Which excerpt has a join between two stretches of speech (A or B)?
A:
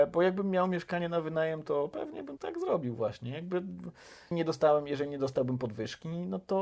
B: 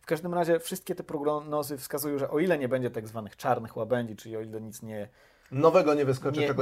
A